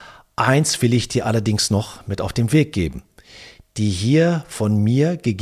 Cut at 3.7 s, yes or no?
no